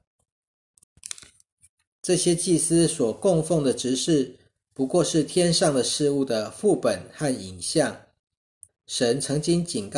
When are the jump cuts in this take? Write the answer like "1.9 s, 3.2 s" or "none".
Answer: 1.9 s, 8.7 s